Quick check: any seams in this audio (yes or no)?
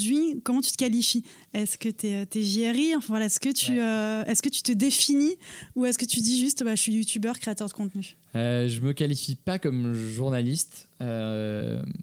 no